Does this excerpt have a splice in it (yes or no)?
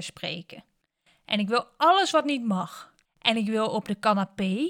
yes